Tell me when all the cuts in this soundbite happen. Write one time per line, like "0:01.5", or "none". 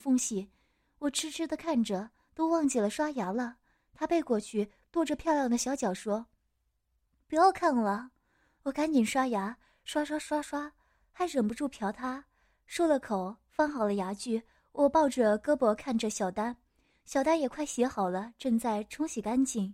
none

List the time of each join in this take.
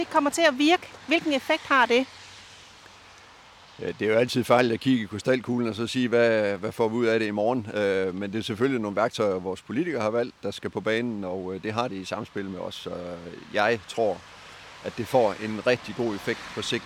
none

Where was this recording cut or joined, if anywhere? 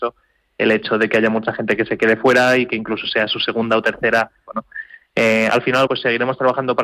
0:04.5
0:05.9

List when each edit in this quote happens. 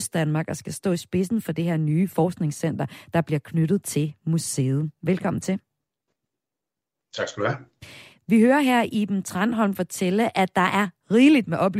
none

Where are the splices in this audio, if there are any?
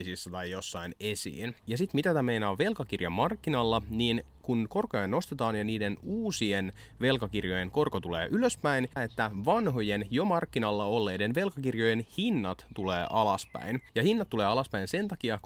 0:01.6
0:09.0

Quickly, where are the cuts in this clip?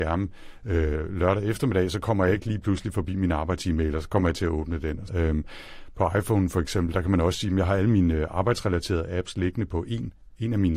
0:05.1

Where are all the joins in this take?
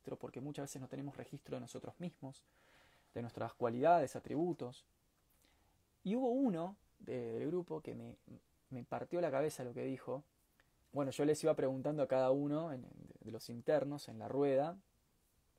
0:10.8

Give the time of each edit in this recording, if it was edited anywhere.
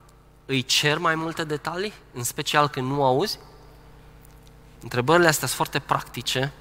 0:04.7

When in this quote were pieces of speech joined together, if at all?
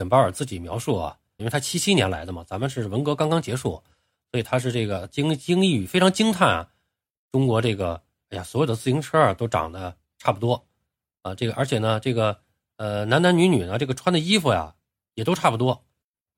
0:01.4

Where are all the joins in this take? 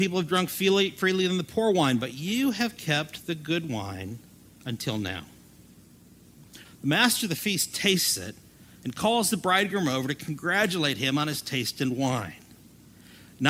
0:06.6

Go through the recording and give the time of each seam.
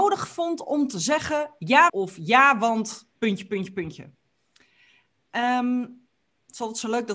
0:01.9
0:03.2

